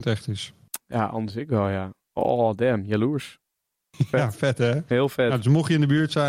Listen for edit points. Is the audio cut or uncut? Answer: uncut